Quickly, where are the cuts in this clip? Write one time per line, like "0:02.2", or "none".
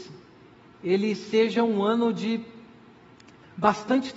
none